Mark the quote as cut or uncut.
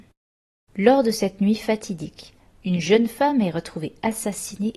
uncut